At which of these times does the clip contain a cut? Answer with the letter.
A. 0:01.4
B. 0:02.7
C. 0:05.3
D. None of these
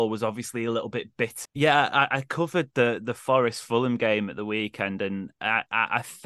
A